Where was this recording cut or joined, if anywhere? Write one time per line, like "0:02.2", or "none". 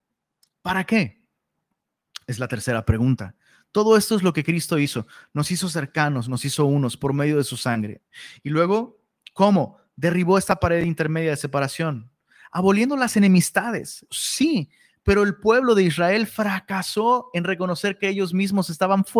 0:14.1